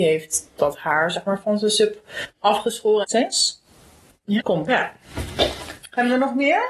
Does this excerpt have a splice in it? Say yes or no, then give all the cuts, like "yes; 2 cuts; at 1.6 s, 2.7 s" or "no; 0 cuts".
yes; 2 cuts; at 3.0 s, 4.4 s